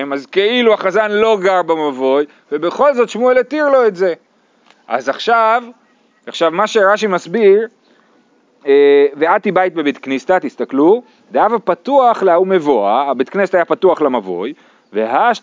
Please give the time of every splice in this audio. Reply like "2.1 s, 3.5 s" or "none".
none